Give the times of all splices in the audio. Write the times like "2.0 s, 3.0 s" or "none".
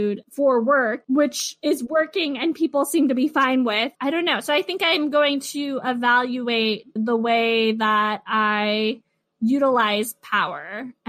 4.0 s, 7.0 s